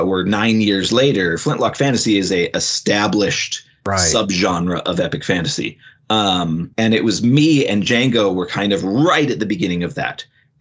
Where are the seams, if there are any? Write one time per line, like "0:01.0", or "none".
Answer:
0:06.7